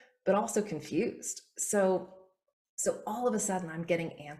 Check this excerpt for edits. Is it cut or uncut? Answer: uncut